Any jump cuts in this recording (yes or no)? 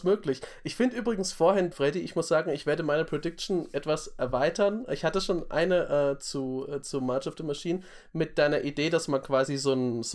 yes